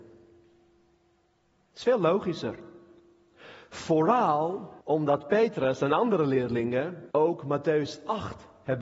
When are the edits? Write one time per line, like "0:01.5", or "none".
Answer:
0:04.8
0:07.1